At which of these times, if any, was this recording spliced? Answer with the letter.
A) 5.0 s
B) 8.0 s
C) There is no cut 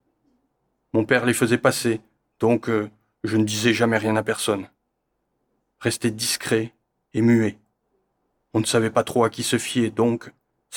C